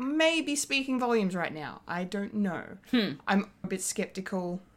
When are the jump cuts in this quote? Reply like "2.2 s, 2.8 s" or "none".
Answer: 3.6 s